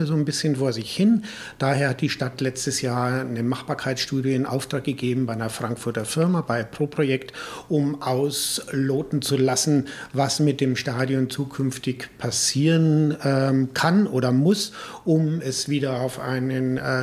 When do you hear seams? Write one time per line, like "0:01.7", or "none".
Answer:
none